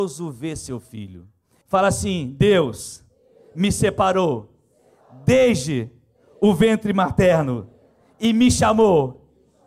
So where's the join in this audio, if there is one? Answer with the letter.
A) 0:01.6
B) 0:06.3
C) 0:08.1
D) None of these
A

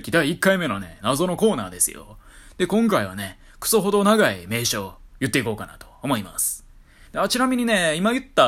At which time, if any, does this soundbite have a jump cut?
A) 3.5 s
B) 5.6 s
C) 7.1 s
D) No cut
C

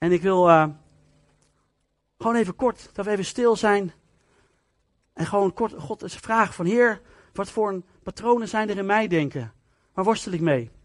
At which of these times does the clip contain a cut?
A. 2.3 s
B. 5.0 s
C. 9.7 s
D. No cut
D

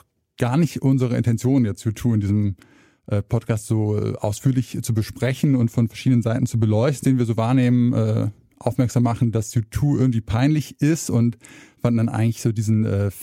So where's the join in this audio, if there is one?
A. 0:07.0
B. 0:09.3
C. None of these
A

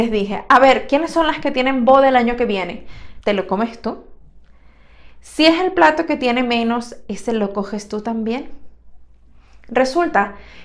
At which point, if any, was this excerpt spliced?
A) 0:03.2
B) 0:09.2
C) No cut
A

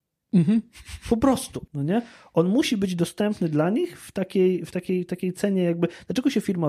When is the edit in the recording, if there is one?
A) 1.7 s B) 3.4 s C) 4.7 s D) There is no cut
A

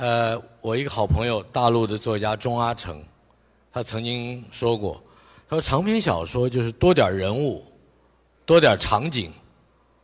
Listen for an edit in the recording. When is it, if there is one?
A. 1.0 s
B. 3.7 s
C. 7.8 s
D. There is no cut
D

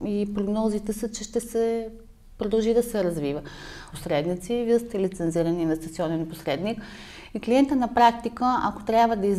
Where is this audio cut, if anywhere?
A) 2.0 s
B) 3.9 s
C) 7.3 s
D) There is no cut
B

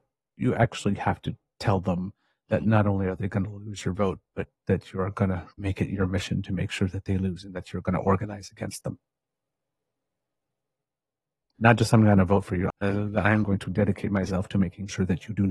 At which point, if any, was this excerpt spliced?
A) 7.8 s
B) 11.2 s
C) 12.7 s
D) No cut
C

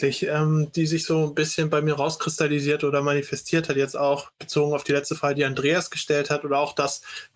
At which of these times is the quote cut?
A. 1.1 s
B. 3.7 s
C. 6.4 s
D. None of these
D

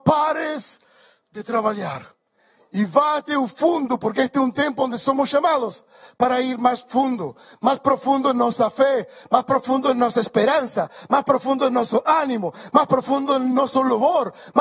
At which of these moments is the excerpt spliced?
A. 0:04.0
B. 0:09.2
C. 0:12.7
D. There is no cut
C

